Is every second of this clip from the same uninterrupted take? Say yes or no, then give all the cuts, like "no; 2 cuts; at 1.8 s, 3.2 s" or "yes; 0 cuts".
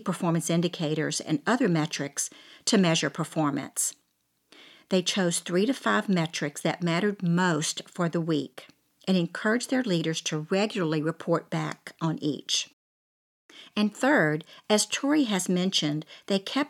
yes; 0 cuts